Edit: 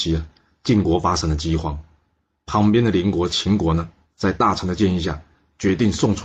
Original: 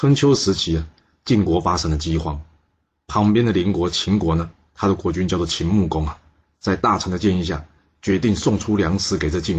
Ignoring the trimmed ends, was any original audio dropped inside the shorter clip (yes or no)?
yes